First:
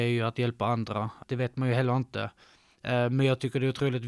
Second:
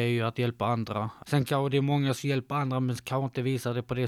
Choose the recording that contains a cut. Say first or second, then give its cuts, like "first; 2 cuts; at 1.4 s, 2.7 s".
first; 1 cut; at 1.2 s